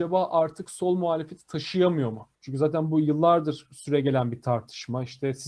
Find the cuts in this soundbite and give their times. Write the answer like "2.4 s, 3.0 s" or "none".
2.3 s